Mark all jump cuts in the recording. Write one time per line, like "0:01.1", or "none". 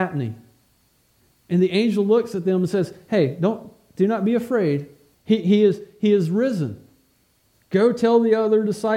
0:05.1
0:07.5